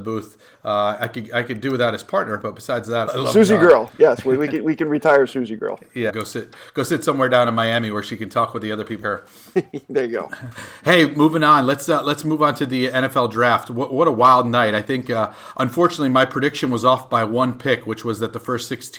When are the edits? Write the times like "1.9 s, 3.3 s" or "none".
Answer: 3.0 s, 6.1 s, 9.0 s